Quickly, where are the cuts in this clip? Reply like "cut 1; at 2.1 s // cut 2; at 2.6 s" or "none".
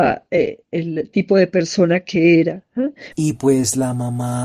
cut 1; at 3.1 s